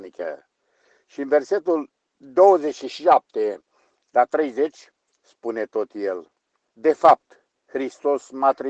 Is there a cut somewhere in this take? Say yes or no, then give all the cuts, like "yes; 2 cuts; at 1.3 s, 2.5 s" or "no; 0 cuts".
yes; 1 cut; at 6.7 s